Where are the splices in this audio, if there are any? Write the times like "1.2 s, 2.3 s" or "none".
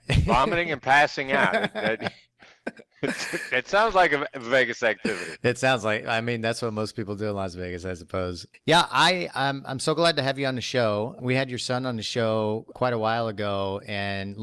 none